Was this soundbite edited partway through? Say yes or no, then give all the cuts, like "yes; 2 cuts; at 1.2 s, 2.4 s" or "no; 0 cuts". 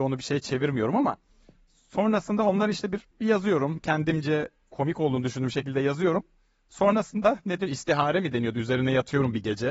yes; 1 cut; at 3.1 s